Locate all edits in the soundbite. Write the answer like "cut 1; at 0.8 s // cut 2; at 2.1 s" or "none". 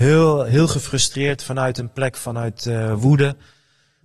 none